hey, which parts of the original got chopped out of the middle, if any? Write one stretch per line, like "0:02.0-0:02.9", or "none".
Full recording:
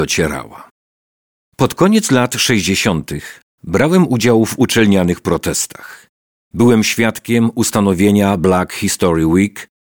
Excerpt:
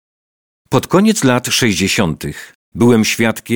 0:03.4-0:06.3